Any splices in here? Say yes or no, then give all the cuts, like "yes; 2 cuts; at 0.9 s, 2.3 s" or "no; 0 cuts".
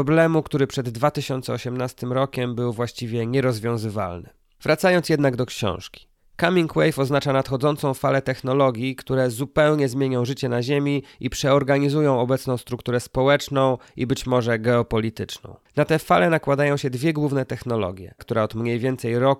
yes; 1 cut; at 18.2 s